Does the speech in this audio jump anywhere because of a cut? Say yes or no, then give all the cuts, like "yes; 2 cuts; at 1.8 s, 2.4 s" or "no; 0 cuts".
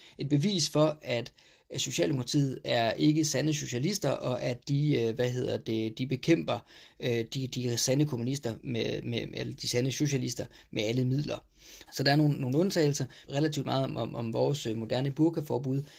yes; 2 cuts; at 11.9 s, 13.3 s